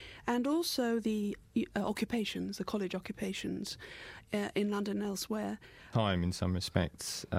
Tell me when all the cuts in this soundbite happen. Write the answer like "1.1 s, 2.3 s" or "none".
5.9 s

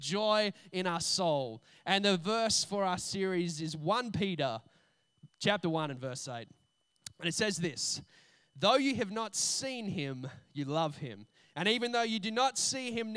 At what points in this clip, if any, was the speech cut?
5.3 s

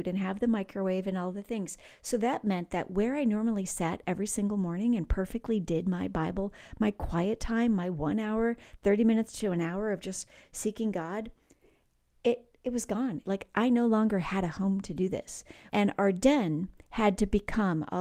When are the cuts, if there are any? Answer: 13.2 s, 15.7 s

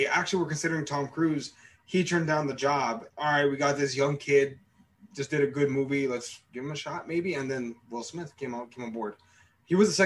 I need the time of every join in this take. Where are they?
3.1 s

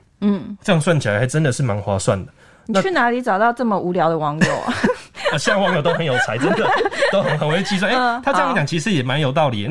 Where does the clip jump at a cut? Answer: none

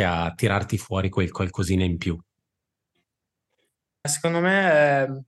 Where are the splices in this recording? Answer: 4.0 s

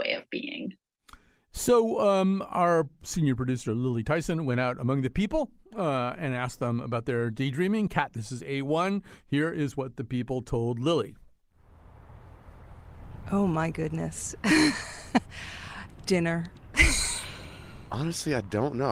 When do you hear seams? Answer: none

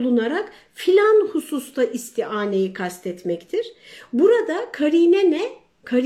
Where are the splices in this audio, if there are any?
none

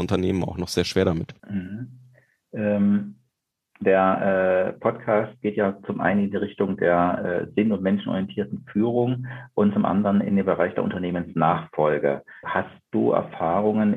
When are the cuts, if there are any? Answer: 1.4 s, 12.4 s

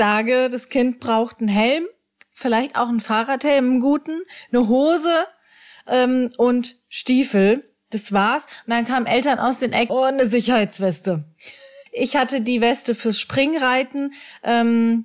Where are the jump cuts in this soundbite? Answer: 9.9 s, 11.9 s

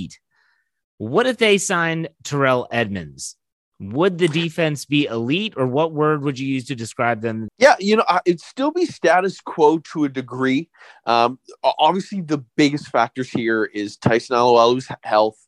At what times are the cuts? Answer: 7.5 s

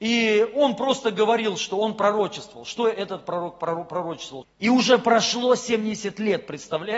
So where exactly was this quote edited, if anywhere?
4.4 s

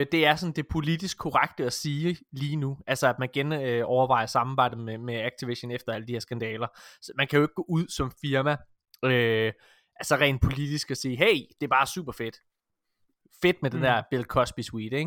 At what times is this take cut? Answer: none

